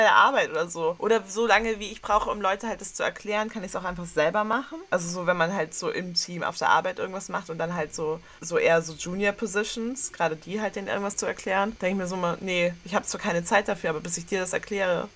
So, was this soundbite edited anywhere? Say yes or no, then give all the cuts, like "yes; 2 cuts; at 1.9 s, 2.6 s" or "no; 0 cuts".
no; 0 cuts